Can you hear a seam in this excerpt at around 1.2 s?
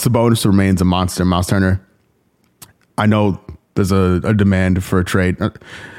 no; 0 cuts

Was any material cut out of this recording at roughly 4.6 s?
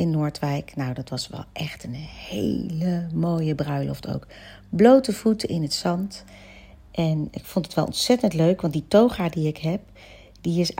no; 0 cuts

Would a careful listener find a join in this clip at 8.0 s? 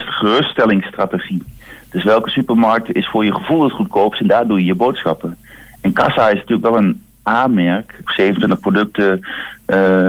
yes; 1 cut; at 8.0 s

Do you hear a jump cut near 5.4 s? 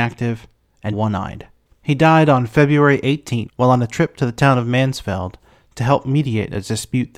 no; 2 cuts; at 0.9 s, 3.5 s

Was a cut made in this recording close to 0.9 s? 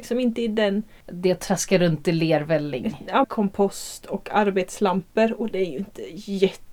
no; 1 cut; at 3.2 s

